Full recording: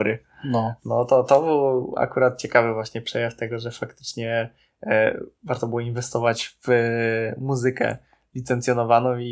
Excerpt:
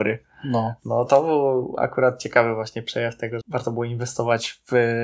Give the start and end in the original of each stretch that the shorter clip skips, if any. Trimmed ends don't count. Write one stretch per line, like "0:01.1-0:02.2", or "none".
0:01.1-0:01.3
0:03.6-0:05.4